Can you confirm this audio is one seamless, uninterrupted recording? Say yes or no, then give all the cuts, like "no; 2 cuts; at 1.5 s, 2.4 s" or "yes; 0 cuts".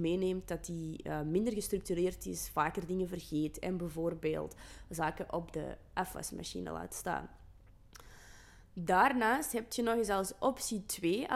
yes; 0 cuts